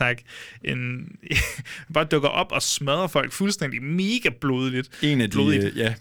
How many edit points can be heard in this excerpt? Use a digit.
0